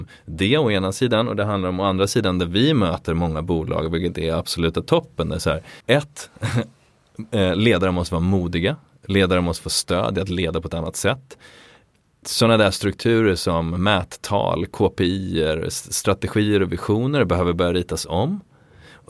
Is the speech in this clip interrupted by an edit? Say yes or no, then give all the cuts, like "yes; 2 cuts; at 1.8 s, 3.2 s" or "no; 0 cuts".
yes; 1 cut; at 5.8 s